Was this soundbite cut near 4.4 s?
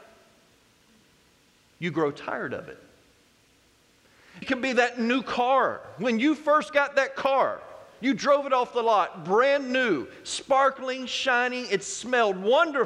yes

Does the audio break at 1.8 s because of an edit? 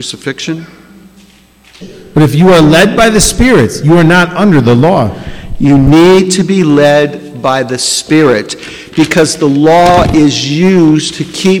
yes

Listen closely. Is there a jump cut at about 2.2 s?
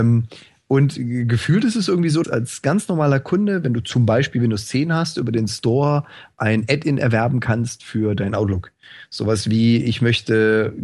yes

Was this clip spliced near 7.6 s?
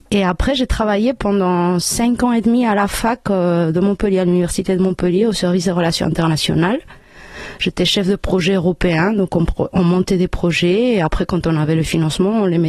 no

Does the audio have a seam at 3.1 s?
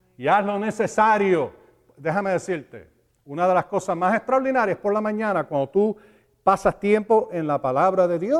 no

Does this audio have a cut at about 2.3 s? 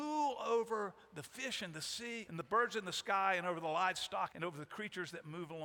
yes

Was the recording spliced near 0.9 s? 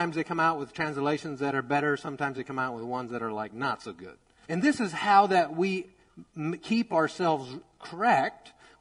no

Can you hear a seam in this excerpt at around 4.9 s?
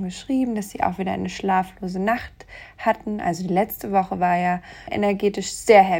yes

